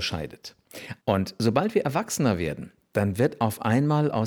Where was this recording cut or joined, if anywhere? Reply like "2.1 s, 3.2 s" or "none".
1.0 s